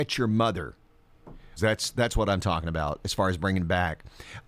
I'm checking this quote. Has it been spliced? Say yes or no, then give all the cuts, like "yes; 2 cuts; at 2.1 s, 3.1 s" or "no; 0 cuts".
yes; 1 cut; at 1.6 s